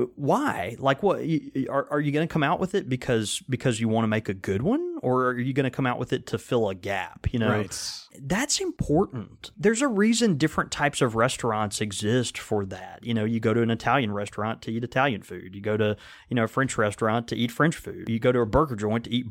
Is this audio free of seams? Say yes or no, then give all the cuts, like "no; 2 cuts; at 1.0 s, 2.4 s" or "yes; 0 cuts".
yes; 0 cuts